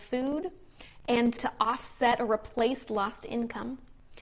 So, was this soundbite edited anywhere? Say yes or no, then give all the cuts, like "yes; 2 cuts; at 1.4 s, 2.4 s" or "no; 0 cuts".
yes; 1 cut; at 1.4 s